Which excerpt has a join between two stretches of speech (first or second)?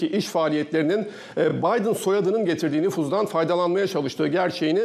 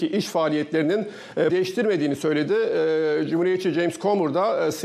second